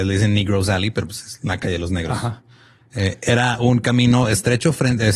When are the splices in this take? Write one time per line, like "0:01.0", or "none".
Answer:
none